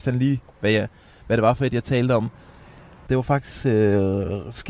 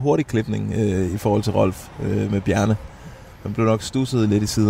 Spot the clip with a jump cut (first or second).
first